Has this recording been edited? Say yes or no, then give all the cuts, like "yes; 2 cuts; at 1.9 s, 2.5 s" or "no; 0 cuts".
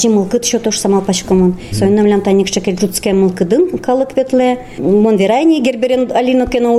no; 0 cuts